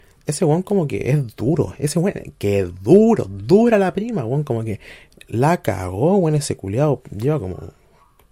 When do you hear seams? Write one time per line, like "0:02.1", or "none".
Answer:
none